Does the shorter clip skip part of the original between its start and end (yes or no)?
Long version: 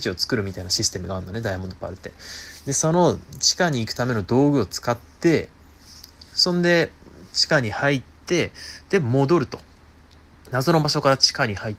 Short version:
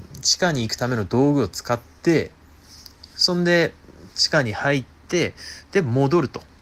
no